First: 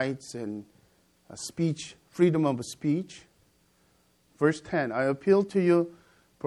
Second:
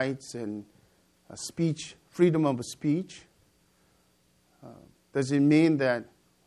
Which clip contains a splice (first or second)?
first